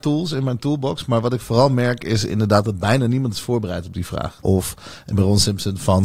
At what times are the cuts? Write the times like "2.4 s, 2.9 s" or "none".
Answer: 4.4 s